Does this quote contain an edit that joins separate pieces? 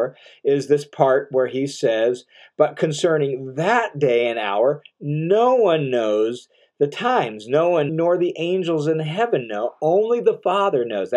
yes; 1 cut; at 7.9 s

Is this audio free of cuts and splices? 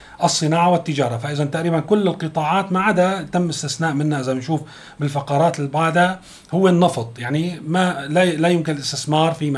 yes; 0 cuts

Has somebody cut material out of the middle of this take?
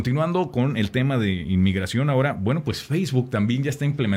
no; 0 cuts

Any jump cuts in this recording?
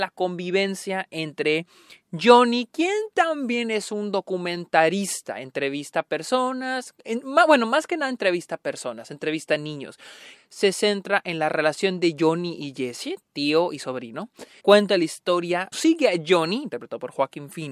yes; 3 cuts; at 10.3 s, 14.6 s, 15.7 s

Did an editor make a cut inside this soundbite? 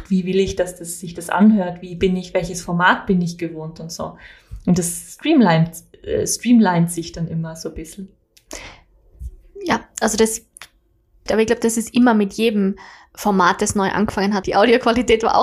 yes; 2 cuts; at 11.3 s, 14.4 s

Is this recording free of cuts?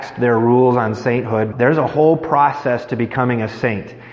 no; 1 cut; at 1.5 s

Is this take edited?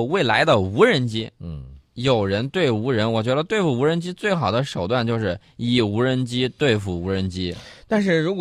no; 0 cuts

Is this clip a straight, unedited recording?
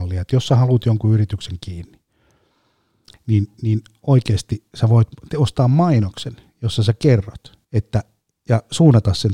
no; 2 cuts; at 3.5 s, 7.6 s

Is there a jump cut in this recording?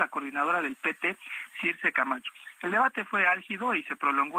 no; 0 cuts

